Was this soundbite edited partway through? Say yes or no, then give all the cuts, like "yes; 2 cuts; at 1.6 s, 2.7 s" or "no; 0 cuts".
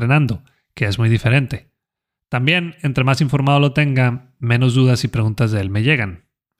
no; 0 cuts